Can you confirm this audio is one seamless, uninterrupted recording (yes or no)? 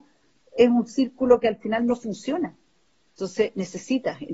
yes